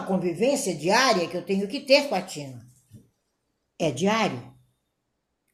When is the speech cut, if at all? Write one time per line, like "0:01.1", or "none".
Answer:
none